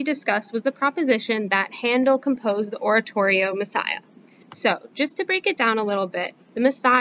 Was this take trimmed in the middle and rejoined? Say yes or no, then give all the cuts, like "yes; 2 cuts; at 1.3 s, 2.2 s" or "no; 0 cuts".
yes; 1 cut; at 4.4 s